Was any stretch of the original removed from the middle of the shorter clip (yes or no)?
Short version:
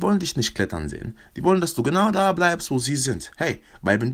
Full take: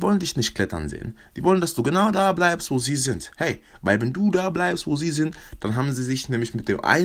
no